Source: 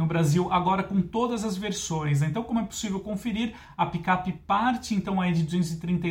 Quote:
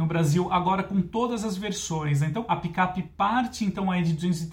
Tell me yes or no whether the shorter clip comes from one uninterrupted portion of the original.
no